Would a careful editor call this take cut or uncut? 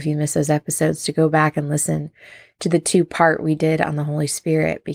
uncut